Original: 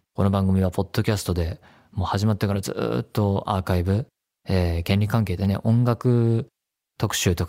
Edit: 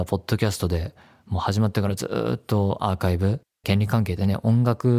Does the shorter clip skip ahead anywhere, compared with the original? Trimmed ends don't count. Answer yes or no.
yes